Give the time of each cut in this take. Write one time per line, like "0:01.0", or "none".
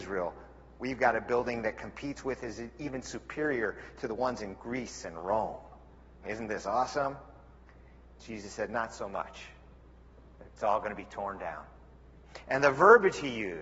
0:06.2

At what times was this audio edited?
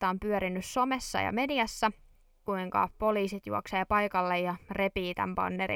0:02.5

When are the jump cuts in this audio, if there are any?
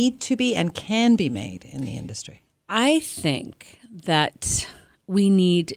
none

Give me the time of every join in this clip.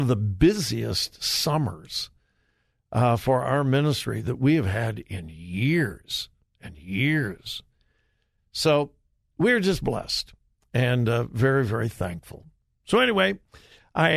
none

